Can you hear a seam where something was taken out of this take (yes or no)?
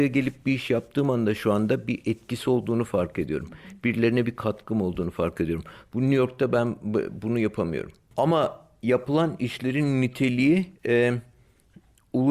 yes